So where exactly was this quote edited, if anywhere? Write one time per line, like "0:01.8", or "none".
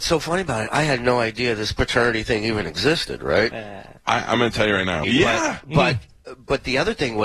0:03.5
0:05.0